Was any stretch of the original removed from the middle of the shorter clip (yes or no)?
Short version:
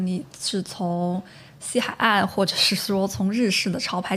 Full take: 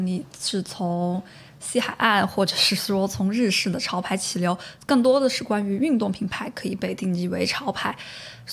no